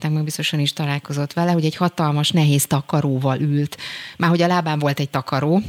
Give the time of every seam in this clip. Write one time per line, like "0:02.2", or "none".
none